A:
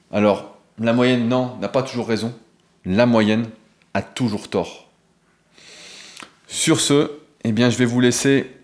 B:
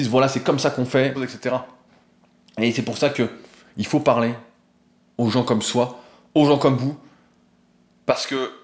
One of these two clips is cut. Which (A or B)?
B